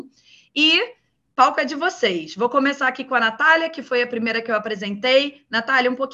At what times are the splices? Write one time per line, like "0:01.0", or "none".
none